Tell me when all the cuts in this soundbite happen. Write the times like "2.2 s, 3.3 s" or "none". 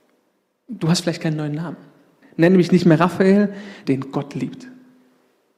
2.2 s, 3.8 s